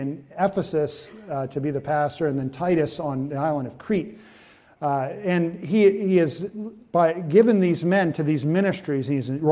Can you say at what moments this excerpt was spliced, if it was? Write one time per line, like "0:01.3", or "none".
none

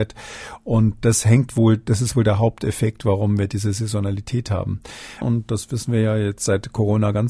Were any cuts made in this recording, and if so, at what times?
0:05.2

